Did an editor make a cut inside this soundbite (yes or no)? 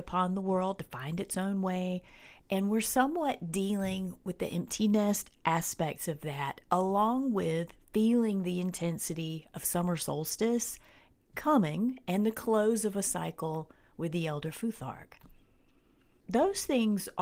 no